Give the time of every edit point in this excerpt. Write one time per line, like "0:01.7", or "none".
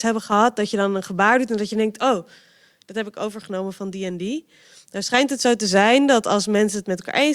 none